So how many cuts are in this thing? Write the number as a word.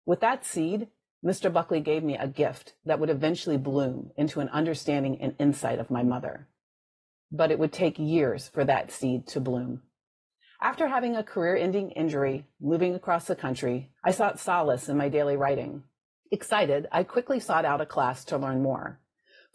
two